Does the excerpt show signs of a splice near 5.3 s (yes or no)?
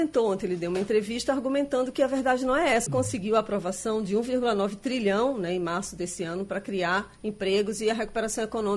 no